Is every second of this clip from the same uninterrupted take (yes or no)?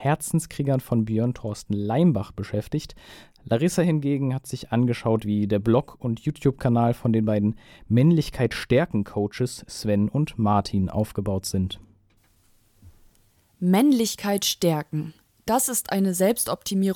yes